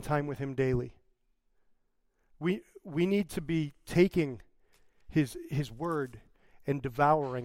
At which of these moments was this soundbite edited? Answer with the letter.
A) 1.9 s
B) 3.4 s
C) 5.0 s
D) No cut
D